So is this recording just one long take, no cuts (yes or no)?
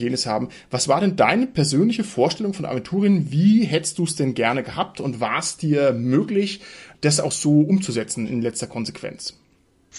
yes